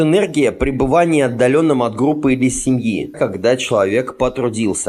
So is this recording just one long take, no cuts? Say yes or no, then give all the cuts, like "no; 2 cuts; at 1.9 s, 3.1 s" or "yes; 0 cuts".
no; 1 cut; at 3.1 s